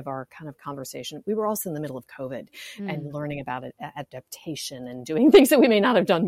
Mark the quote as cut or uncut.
uncut